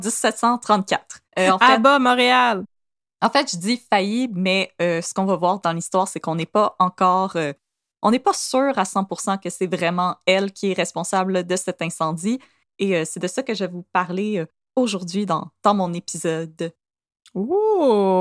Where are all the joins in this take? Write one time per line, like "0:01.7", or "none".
0:01.3